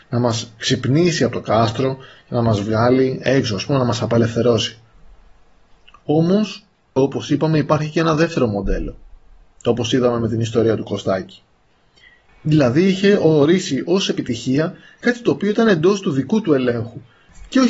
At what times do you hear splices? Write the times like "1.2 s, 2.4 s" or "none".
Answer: 7.0 s, 12.3 s

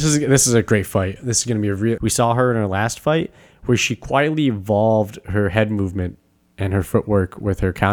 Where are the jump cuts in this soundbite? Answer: 2.0 s

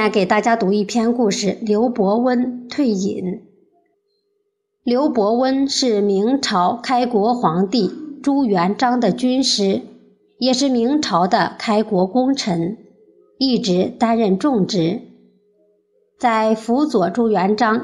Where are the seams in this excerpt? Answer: none

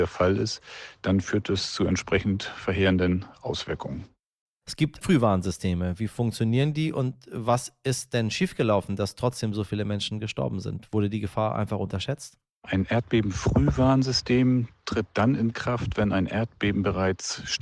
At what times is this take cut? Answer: 5.0 s

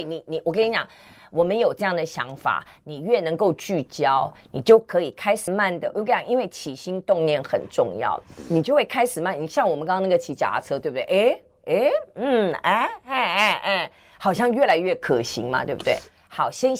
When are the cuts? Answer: 5.5 s

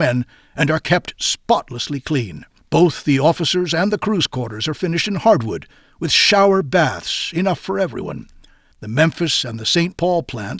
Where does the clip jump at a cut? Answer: 2.6 s, 8.7 s

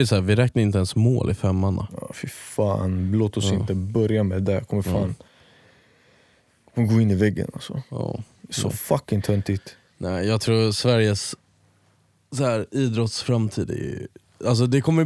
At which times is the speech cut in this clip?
none

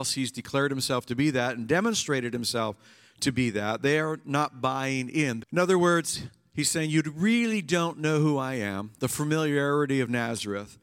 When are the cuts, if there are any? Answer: 5.4 s

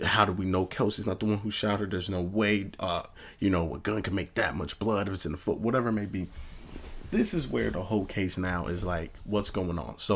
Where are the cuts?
none

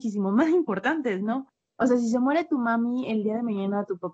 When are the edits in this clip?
1.7 s

